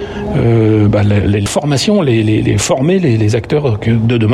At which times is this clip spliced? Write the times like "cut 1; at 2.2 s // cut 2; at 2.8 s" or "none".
cut 1; at 1.5 s